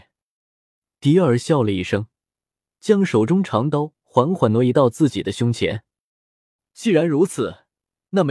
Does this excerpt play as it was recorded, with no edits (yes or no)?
yes